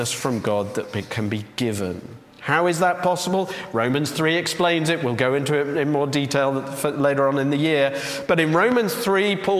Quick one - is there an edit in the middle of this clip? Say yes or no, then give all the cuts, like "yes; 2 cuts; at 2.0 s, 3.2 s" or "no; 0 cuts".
no; 0 cuts